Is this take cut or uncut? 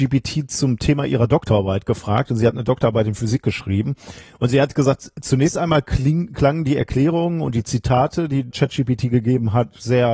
cut